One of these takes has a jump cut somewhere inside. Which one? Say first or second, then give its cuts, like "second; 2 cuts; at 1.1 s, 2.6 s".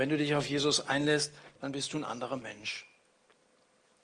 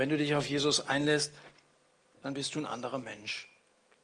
first; 1 cut; at 1.5 s